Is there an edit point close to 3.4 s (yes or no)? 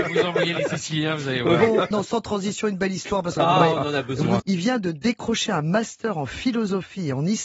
yes